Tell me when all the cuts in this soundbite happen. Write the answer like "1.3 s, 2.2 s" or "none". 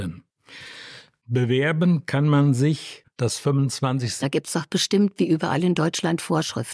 3.0 s, 4.2 s